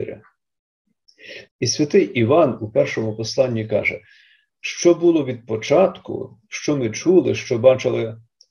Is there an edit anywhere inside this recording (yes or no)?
yes